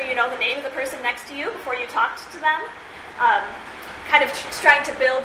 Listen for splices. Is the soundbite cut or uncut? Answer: uncut